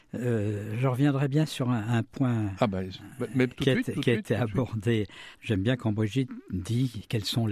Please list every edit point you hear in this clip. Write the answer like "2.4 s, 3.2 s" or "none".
5.3 s